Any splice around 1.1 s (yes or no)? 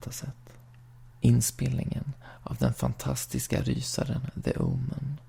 yes